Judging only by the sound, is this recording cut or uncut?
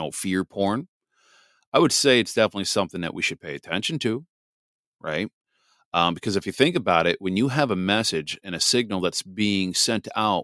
uncut